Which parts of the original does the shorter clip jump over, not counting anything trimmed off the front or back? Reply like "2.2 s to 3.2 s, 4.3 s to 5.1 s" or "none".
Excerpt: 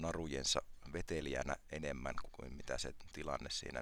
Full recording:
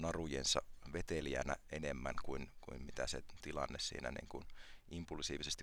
2.2 s to 2.5 s